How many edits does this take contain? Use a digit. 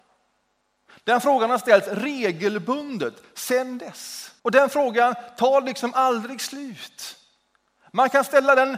1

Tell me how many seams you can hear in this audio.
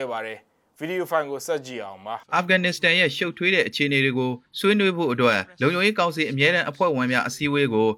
1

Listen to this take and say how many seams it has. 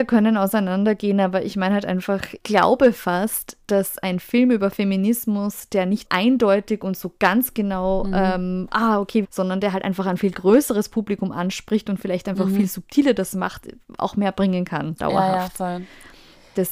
3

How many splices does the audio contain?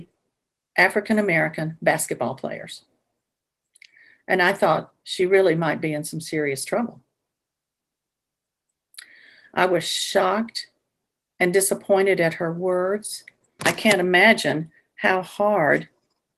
1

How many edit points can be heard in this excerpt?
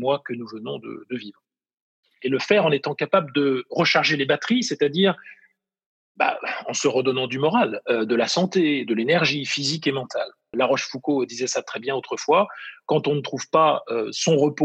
2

